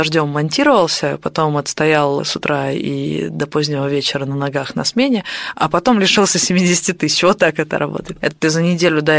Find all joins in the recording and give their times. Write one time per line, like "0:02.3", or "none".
0:08.2